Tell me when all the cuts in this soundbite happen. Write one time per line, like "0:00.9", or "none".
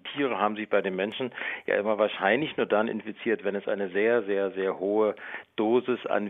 none